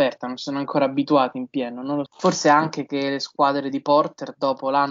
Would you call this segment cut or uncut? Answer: cut